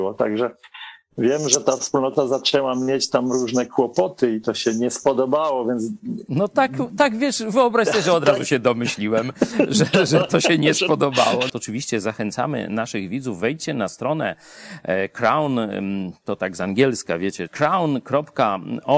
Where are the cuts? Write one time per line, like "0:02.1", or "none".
0:11.5
0:17.5